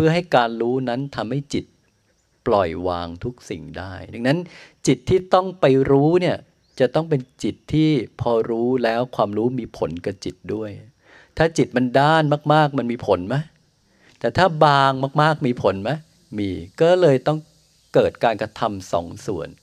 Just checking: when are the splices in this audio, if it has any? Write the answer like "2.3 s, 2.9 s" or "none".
none